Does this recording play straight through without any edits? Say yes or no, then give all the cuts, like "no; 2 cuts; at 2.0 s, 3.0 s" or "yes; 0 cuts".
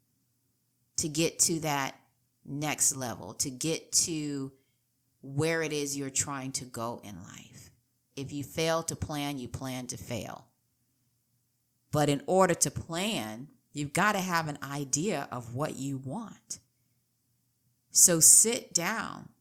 no; 1 cut; at 8.1 s